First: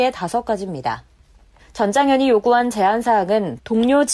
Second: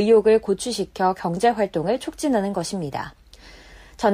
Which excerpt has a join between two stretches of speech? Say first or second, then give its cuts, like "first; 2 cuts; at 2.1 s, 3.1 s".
first; 1 cut; at 1.6 s